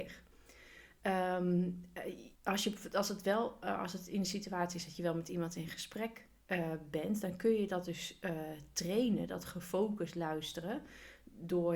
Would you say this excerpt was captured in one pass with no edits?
no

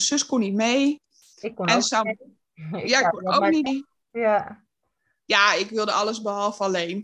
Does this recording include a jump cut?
yes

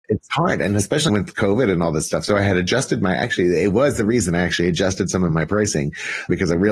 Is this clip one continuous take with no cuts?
no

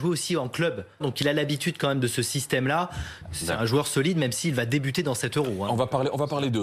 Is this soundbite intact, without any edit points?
no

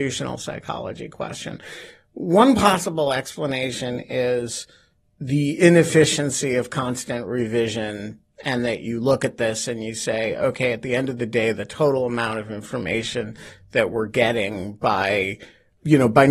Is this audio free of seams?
no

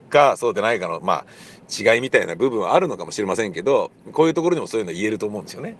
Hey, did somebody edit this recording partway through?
no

